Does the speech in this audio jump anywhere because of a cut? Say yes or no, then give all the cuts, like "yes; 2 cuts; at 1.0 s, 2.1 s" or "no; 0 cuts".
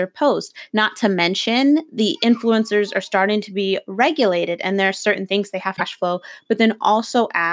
no; 0 cuts